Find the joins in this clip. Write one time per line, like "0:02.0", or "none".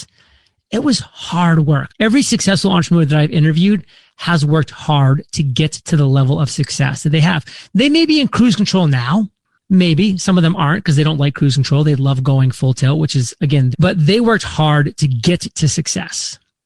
0:01.9
0:13.7